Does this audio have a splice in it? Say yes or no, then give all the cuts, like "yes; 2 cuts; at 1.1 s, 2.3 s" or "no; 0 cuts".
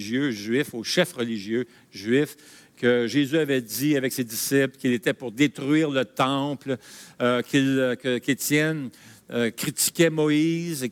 no; 0 cuts